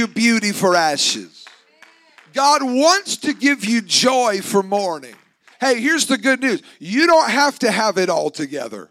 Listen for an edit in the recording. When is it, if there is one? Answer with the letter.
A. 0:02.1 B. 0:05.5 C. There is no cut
B